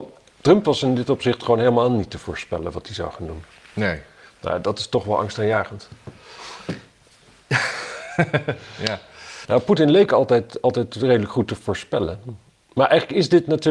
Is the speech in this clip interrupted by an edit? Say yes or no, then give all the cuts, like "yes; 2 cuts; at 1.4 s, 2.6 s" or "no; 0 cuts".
yes; 1 cut; at 9.4 s